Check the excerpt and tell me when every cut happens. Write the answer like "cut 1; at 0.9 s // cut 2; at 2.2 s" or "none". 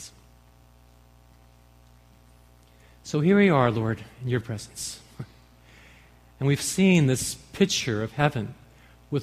cut 1; at 4.4 s